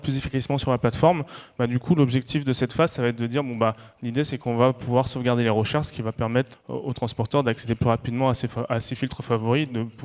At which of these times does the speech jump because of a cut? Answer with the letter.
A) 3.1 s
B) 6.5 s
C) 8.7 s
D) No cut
B